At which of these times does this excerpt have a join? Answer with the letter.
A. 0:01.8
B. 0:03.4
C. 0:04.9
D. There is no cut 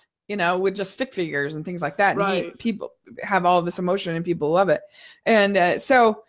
D